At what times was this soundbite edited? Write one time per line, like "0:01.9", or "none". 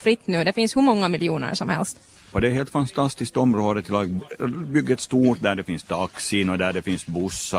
0:02.3

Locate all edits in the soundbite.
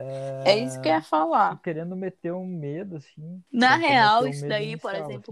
0:03.5

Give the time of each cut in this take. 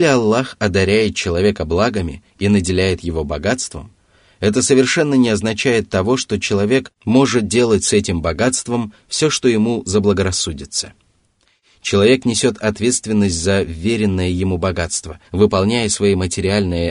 0:15.2

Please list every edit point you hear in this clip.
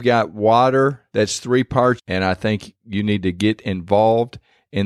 0:02.0

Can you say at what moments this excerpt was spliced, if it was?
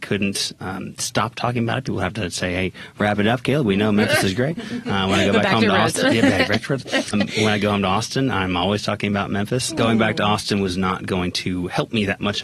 0:07.1
0:09.7

